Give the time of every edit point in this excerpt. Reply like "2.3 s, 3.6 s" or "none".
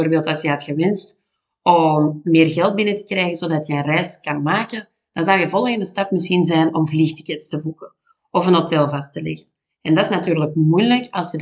none